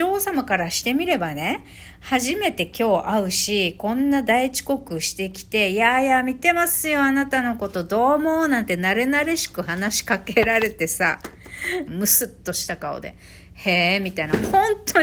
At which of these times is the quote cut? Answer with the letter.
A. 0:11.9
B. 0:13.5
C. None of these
A